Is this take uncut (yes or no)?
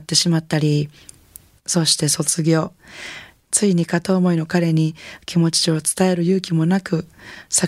yes